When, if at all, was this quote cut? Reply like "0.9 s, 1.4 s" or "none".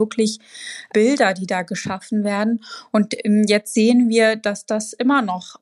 none